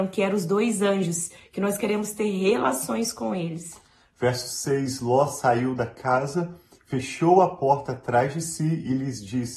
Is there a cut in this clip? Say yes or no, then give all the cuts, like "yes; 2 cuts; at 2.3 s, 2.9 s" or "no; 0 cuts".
no; 0 cuts